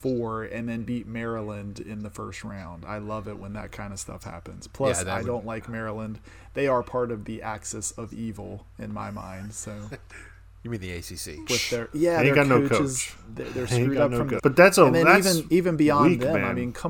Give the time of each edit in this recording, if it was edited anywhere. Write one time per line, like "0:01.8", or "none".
0:11.5
0:14.4